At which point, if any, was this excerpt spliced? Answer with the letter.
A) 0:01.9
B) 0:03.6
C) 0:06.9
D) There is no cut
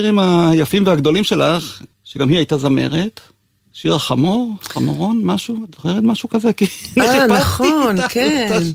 A